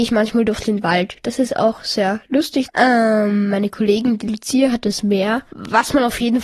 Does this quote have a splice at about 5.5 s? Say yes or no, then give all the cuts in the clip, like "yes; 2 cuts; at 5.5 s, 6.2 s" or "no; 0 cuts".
no; 1 cut; at 2.7 s